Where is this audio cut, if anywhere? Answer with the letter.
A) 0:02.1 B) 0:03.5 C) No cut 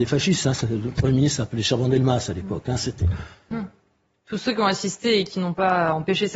B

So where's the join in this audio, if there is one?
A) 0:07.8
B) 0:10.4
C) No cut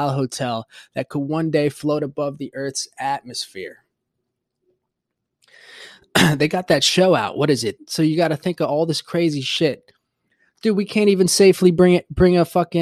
A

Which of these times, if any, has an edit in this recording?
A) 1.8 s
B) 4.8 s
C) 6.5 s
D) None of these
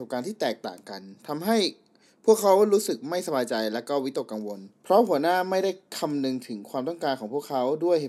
B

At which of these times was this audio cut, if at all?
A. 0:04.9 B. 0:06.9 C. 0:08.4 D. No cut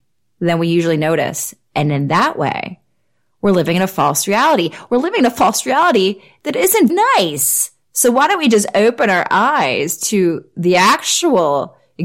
B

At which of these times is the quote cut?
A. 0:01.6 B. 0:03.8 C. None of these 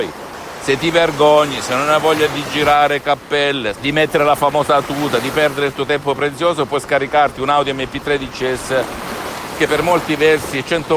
B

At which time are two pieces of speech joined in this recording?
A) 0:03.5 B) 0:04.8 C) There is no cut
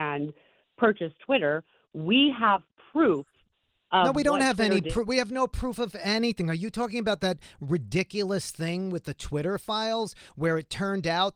C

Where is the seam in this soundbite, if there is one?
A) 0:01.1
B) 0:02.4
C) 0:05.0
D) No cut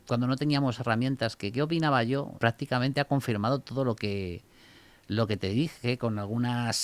B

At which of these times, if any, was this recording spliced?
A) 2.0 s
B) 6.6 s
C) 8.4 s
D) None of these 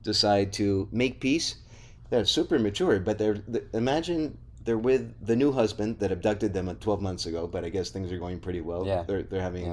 A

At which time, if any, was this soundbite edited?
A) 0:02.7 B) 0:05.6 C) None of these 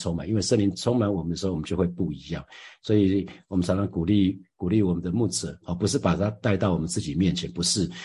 B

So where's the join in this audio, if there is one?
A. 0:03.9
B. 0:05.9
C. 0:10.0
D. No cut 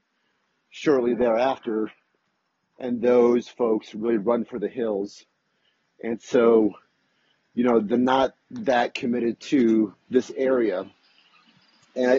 C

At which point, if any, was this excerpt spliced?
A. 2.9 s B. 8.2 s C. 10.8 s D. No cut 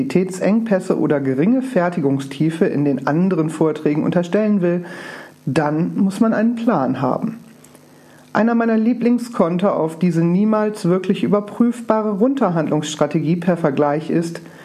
D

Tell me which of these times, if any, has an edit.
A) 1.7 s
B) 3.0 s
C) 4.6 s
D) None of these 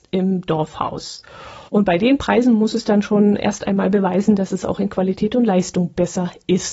A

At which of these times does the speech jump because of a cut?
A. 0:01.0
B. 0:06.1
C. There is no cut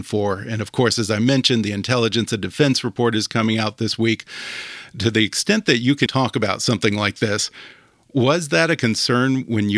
B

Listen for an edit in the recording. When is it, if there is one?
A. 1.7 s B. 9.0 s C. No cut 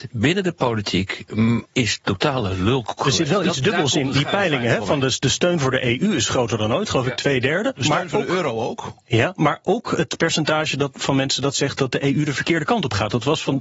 A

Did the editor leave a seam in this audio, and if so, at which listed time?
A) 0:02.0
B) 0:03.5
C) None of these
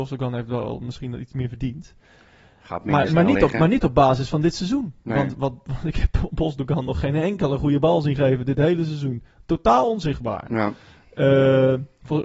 C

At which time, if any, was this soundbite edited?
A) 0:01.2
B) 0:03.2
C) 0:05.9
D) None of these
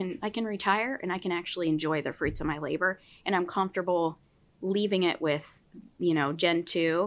D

